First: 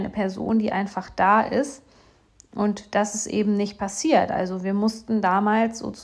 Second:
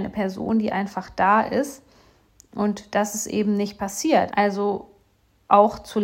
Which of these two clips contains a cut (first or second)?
second